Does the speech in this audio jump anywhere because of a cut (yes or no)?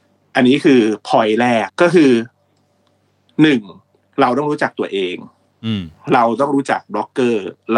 yes